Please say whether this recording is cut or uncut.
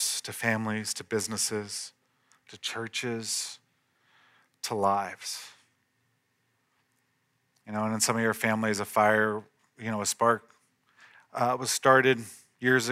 uncut